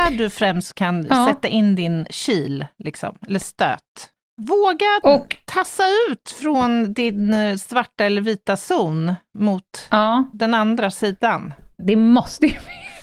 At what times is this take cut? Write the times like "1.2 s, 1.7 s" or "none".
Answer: 4.2 s, 11.8 s